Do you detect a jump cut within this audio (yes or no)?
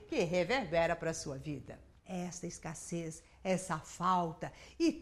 yes